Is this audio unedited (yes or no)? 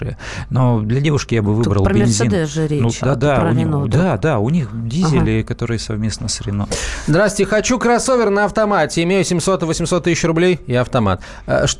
no